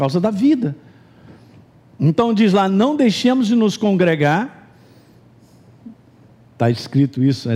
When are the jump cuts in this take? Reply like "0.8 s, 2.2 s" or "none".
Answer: none